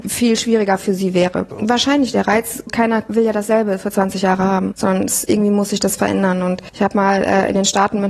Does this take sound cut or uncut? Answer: cut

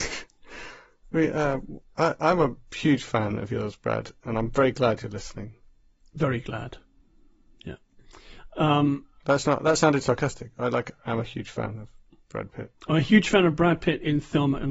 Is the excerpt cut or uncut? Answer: uncut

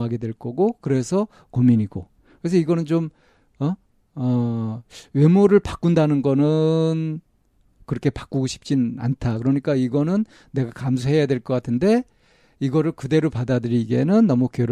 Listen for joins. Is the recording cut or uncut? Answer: uncut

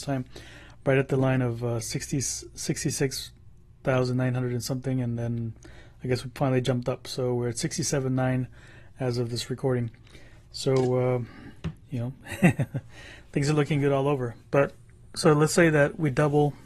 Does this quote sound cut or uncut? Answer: uncut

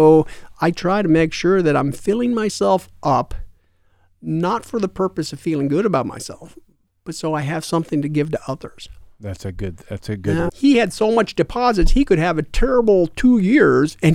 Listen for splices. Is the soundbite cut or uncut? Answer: cut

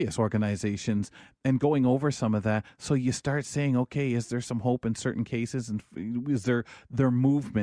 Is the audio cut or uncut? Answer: uncut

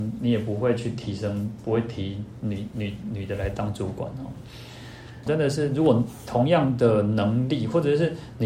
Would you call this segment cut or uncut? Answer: cut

